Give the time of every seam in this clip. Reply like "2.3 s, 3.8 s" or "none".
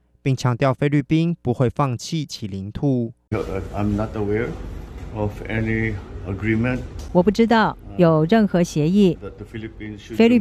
none